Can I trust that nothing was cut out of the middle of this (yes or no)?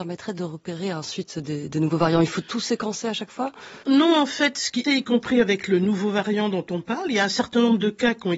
no